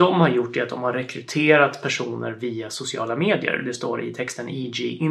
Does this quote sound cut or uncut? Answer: uncut